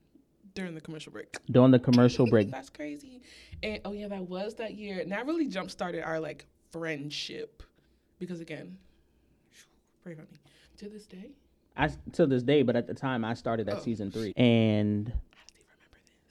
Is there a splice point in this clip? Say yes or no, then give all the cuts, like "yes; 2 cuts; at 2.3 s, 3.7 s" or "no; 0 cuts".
yes; 3 cuts; at 2.5 s, 10.6 s, 14.3 s